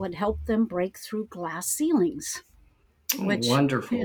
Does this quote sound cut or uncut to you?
uncut